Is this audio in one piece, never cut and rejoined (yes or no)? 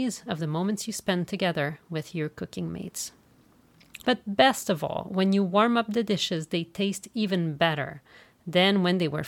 no